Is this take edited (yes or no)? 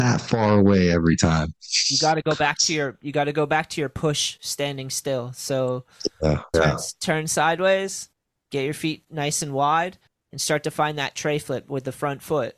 yes